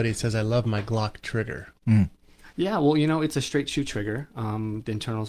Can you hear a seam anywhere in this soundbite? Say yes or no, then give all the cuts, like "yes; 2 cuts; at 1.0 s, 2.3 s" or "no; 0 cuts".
no; 0 cuts